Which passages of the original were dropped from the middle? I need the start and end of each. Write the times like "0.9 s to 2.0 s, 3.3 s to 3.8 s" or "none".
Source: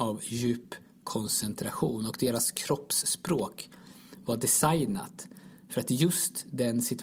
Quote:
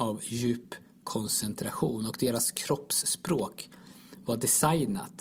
none